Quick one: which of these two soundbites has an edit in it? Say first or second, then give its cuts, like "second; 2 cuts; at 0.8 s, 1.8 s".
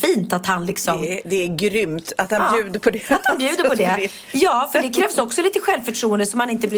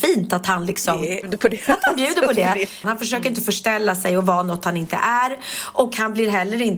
second; 2 cuts; at 1.2 s, 2.8 s